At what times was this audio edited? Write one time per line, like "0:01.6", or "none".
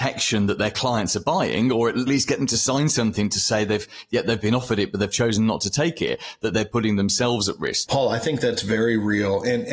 0:02.1
0:07.9